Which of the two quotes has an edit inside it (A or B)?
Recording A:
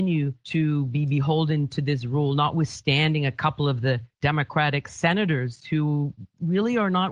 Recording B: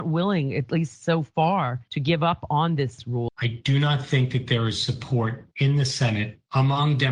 B